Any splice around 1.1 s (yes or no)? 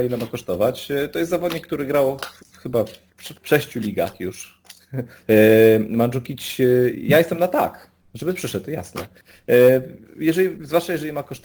no